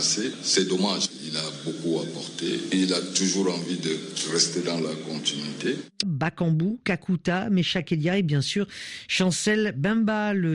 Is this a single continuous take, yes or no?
no